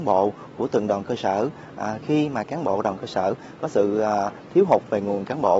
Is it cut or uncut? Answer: uncut